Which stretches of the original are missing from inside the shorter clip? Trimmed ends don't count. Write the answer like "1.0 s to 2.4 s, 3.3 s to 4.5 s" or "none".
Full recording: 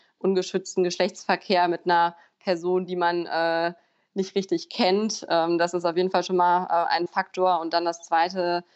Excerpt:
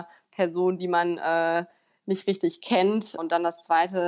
5.3 s to 7.6 s